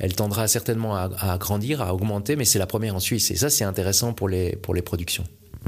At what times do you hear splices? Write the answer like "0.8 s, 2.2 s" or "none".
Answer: none